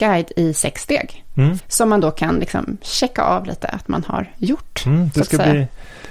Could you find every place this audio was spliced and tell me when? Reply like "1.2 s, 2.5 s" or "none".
1.6 s